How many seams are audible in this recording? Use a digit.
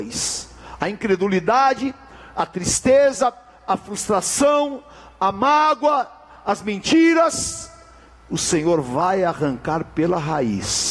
0